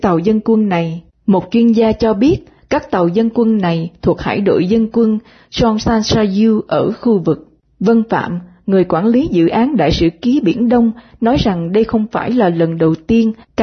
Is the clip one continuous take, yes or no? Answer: no